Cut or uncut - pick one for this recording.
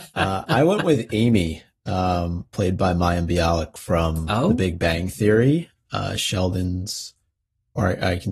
uncut